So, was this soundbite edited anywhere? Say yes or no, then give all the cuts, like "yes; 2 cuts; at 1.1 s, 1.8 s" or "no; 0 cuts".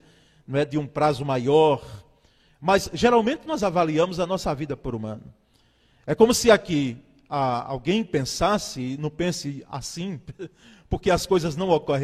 no; 0 cuts